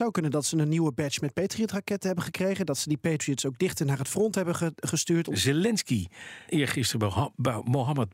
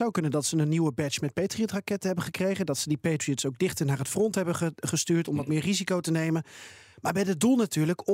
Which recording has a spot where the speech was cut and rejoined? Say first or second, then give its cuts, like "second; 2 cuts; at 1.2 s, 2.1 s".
first; 2 cuts; at 5.3 s, 6.5 s